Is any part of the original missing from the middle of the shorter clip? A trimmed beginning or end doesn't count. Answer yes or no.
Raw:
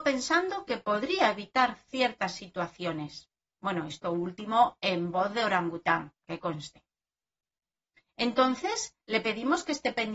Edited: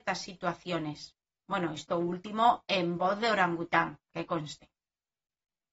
no